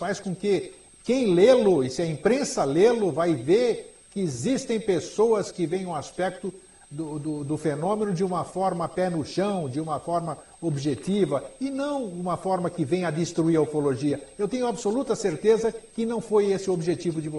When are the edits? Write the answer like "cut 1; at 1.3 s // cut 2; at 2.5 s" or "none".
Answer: none